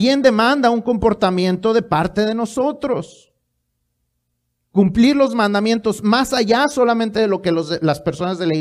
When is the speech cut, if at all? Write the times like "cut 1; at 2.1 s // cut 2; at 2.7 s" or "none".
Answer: none